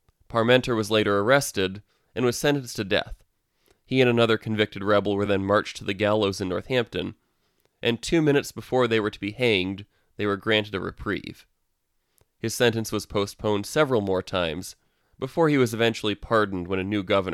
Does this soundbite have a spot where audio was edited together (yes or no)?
no